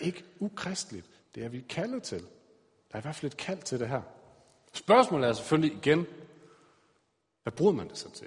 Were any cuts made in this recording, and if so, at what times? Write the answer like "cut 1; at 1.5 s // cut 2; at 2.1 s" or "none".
cut 1; at 1.2 s